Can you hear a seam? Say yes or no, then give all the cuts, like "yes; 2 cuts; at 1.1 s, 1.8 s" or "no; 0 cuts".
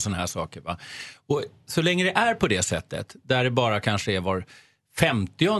no; 0 cuts